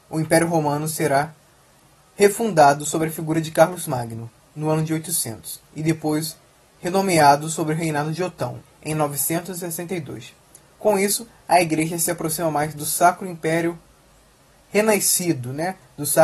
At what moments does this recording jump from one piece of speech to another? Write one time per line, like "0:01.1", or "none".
0:08.7